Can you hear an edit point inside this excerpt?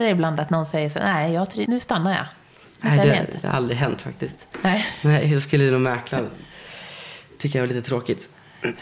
yes; 1 cut; at 1.7 s

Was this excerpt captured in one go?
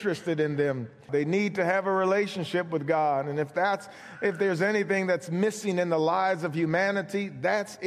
no; 1 cut; at 1.1 s

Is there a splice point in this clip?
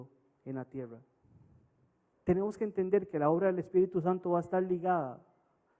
yes; 1 cut; at 2.1 s

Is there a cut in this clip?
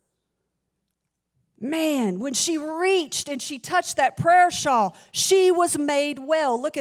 no; 0 cuts

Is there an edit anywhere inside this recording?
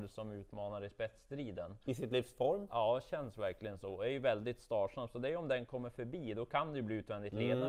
no; 0 cuts

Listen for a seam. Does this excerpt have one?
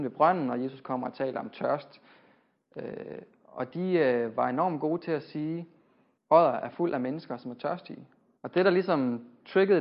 yes; 2 cuts; at 6.2 s, 8.4 s

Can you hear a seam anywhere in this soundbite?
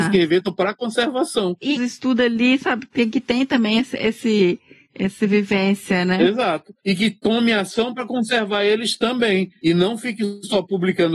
yes; 1 cut; at 1.8 s

